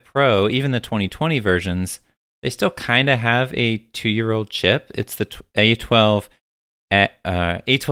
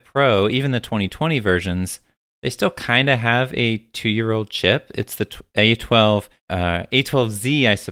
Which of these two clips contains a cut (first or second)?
second